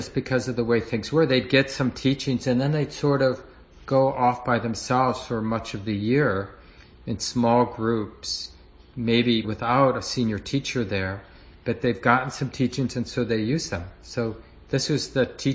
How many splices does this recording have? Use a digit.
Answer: 1